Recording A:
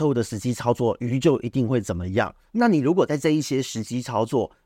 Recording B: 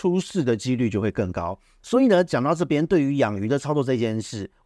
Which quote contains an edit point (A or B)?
A